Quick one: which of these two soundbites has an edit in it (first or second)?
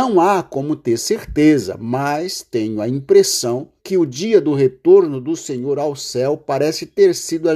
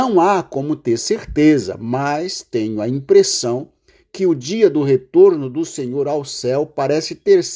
first